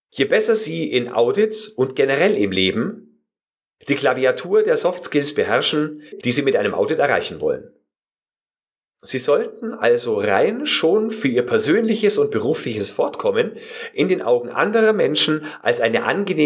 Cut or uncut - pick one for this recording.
cut